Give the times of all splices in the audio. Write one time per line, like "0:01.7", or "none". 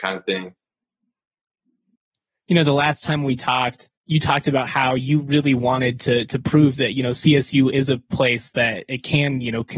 0:03.9